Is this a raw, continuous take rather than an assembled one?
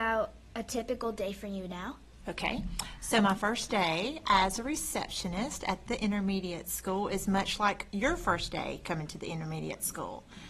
yes; 0 cuts

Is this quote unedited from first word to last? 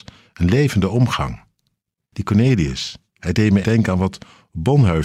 no; 1 cut; at 3.6 s

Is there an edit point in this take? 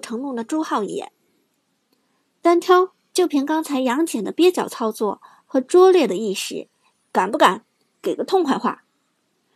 yes; 2 cuts; at 3.1 s, 6.9 s

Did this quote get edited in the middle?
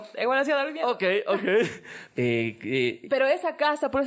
yes; 1 cut; at 2.1 s

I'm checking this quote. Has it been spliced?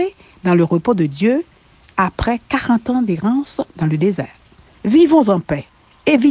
yes; 1 cut; at 4.6 s

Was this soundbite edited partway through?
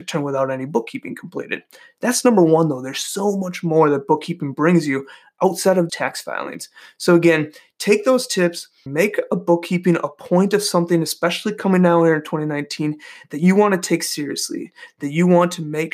yes; 2 cuts; at 5.9 s, 8.9 s

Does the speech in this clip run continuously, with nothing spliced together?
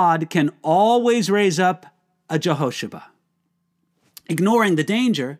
yes; 0 cuts

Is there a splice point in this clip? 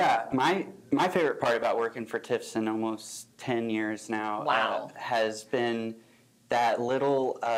no; 0 cuts

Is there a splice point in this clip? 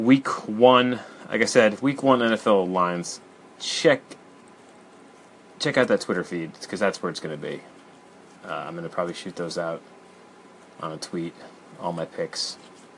no; 0 cuts

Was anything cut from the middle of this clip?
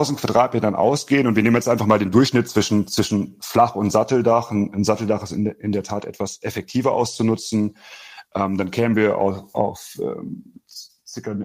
no; 0 cuts

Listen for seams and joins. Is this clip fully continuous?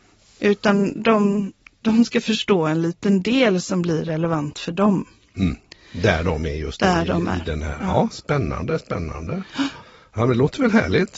yes; 0 cuts

